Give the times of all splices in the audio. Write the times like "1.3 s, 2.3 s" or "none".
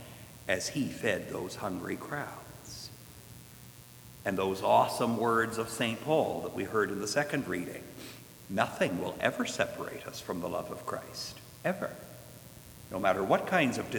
none